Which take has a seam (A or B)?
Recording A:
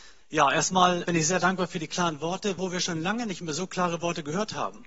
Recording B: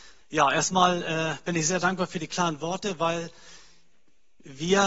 A